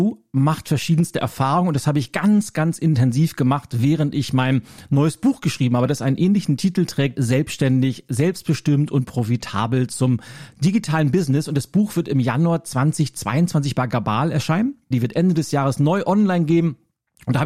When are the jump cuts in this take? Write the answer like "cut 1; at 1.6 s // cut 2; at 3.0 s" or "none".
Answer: cut 1; at 7.1 s // cut 2; at 14.9 s